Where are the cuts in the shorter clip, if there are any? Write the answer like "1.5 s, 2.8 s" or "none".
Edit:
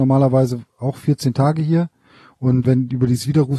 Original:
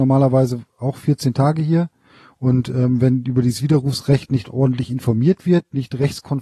2.6 s